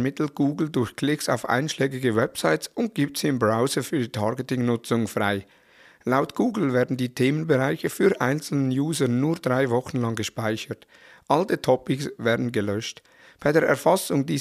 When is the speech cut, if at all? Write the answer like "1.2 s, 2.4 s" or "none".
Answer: none

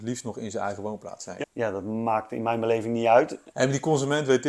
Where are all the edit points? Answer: 1.4 s, 3.5 s

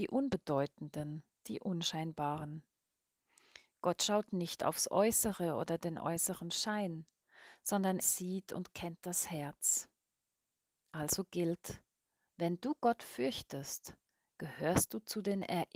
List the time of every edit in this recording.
8.0 s

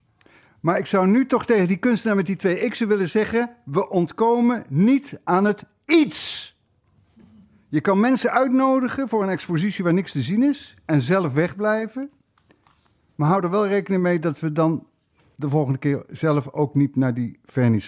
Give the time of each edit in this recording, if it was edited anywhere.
none

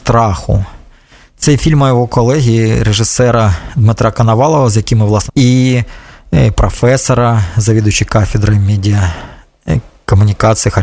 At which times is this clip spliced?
5.3 s

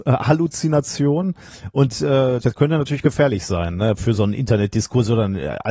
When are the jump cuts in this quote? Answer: 2.4 s

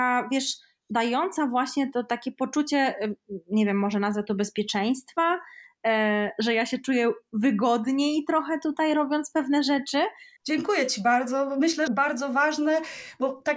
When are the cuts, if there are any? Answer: 10.4 s, 11.9 s

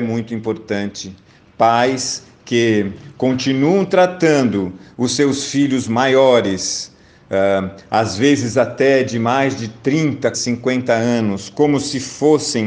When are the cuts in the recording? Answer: 10.3 s

